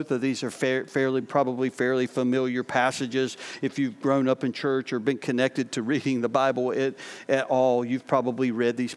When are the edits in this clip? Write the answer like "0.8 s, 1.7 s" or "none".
none